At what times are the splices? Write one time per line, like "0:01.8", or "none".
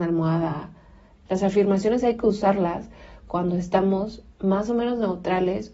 0:01.3